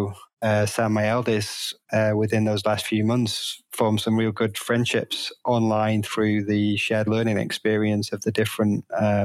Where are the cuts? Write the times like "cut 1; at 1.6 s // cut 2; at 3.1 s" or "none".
none